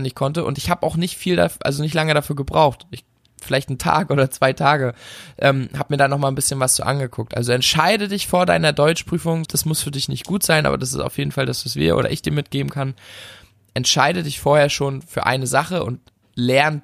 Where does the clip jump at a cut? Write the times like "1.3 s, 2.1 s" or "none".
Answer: 9.5 s